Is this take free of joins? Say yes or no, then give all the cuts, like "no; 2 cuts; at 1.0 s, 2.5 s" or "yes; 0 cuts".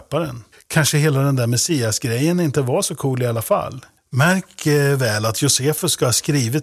no; 1 cut; at 4.0 s